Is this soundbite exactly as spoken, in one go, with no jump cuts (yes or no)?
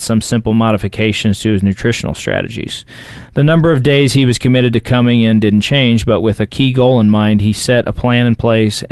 yes